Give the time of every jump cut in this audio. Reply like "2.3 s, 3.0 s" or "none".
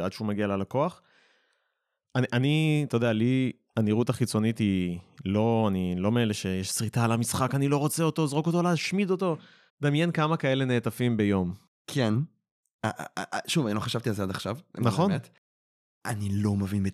9.7 s